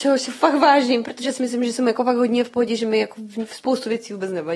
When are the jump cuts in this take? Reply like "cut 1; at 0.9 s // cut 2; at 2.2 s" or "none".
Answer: none